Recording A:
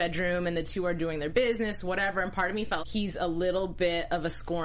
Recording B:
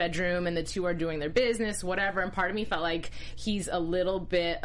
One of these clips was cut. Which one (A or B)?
A